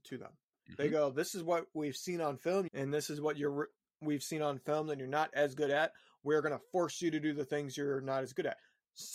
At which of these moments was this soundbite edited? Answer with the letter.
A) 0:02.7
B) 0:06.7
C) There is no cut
A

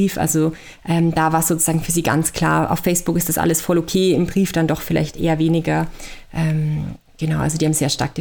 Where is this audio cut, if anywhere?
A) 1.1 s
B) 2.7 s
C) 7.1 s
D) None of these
D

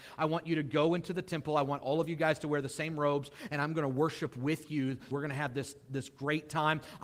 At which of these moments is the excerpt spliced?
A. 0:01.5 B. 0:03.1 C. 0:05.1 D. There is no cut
C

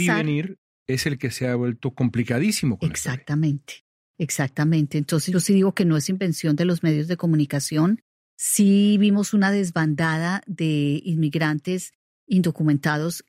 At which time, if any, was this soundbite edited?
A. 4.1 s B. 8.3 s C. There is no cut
B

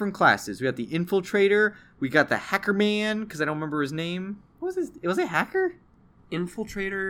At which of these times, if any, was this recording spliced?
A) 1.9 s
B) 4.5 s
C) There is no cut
B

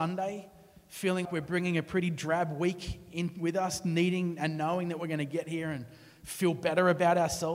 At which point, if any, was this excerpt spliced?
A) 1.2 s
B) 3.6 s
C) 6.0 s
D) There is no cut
A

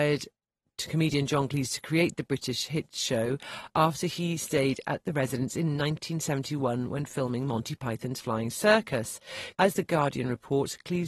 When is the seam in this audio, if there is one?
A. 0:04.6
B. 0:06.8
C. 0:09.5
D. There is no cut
C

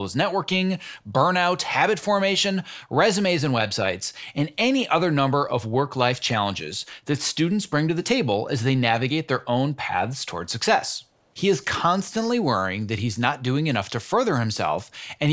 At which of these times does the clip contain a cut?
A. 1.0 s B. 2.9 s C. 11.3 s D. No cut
C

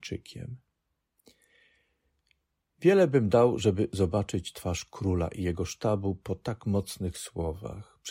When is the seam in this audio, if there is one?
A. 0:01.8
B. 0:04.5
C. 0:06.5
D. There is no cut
D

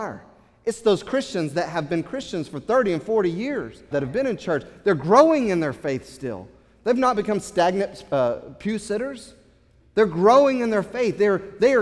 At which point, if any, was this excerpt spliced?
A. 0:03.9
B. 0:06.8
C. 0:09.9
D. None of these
A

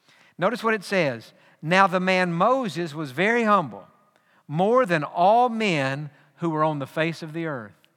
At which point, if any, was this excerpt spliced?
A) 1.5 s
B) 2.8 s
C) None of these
C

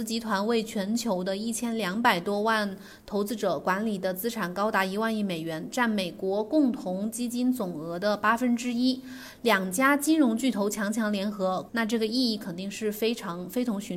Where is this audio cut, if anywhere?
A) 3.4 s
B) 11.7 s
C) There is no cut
B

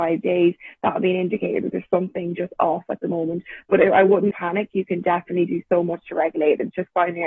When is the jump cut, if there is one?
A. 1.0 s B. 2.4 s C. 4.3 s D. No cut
C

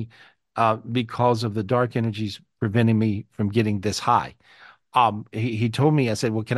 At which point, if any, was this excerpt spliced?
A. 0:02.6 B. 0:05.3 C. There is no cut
B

